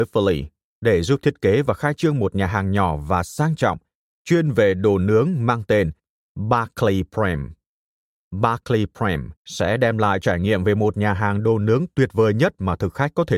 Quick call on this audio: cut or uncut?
cut